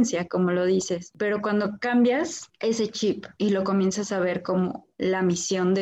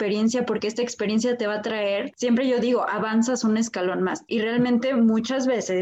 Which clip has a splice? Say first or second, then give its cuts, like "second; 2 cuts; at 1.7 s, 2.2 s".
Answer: second; 1 cut; at 4.3 s